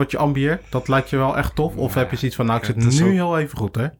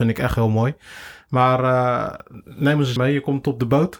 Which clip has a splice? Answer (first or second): second